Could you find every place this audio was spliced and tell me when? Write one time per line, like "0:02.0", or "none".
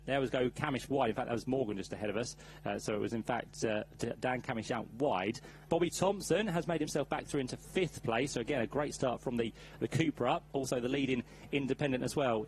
0:05.7